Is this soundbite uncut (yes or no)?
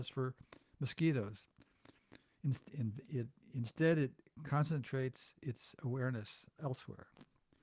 yes